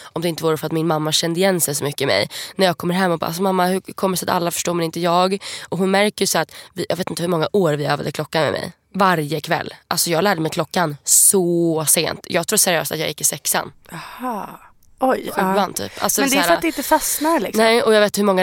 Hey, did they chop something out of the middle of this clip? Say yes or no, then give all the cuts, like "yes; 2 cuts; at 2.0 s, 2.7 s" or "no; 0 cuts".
no; 0 cuts